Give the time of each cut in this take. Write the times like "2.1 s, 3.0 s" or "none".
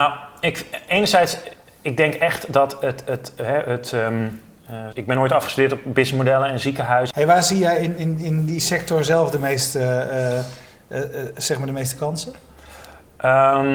4.9 s, 7.1 s

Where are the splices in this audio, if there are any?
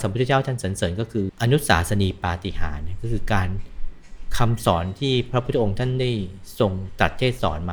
1.3 s

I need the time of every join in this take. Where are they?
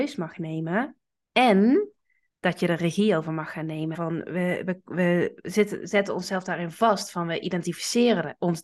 3.9 s

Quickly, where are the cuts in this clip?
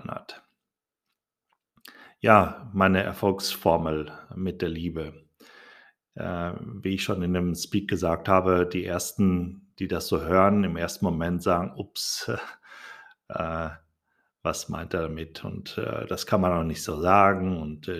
none

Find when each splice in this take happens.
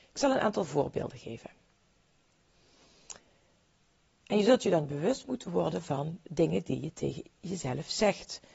4.2 s

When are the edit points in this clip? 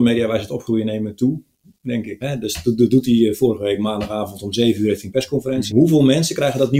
2.2 s, 5.7 s

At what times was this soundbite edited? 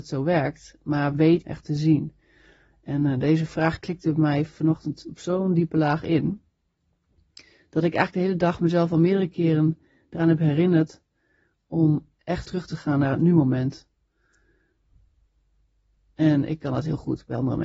1.4 s, 12.4 s

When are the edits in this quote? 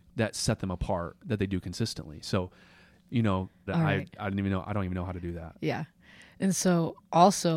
3.7 s

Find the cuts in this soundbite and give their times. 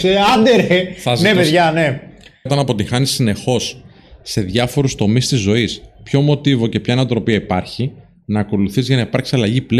2.5 s

